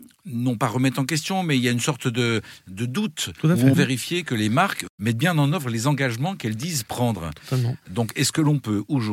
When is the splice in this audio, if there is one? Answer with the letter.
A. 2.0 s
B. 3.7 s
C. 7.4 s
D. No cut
B